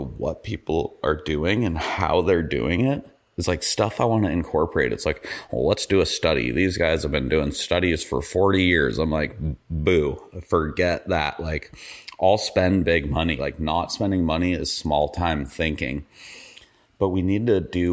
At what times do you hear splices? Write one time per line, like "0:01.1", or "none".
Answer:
0:13.4

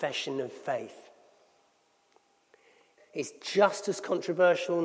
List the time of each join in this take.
0:03.0

